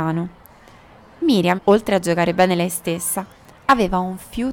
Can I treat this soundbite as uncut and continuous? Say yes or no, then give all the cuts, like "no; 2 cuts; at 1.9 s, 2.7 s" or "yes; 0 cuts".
no; 1 cut; at 1.6 s